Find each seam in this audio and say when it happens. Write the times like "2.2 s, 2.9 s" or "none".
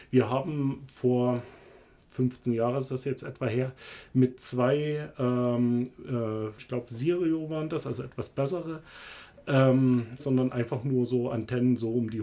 6.6 s, 10.2 s